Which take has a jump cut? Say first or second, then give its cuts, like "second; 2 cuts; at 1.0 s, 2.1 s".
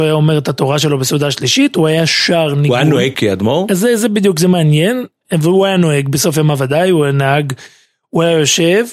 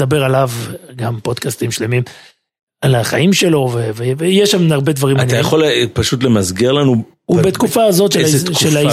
first; 1 cut; at 3.1 s